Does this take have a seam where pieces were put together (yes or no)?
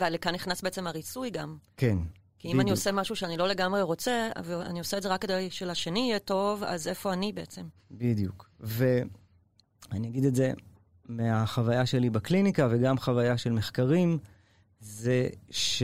no